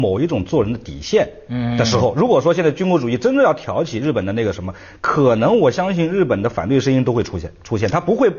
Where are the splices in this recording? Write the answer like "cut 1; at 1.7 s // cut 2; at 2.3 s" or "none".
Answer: none